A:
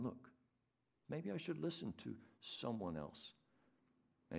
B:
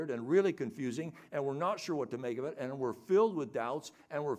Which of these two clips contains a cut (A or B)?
A